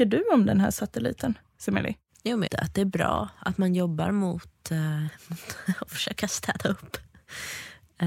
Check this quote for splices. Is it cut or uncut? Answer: cut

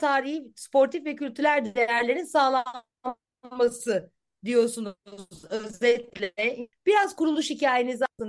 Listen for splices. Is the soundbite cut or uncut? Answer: uncut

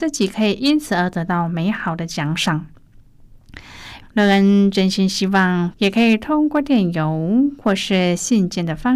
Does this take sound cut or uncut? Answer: cut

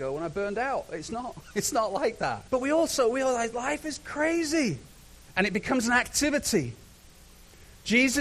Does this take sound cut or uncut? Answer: cut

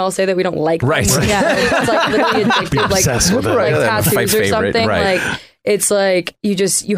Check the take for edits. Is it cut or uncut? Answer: uncut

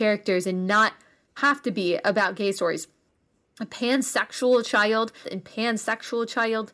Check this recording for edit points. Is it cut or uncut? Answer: cut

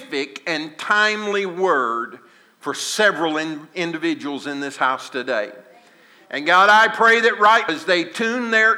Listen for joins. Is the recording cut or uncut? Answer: cut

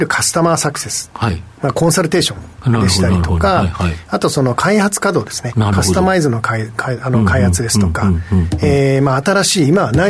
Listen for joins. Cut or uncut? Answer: uncut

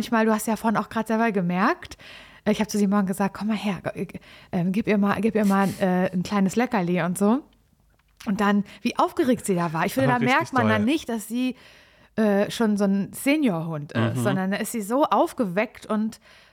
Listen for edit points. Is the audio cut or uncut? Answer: uncut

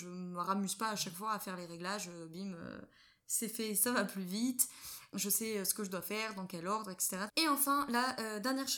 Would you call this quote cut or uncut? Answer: cut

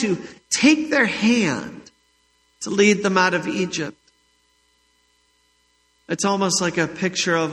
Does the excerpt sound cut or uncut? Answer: uncut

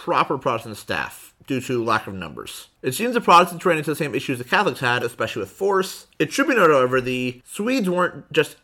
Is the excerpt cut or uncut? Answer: cut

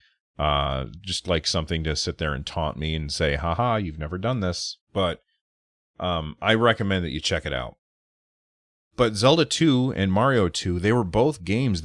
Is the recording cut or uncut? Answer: cut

